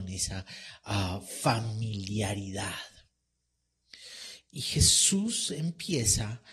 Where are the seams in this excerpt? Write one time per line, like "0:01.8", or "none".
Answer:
0:04.4